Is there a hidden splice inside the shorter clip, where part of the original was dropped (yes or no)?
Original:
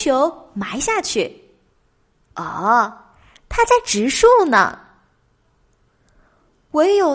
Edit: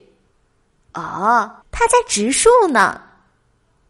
yes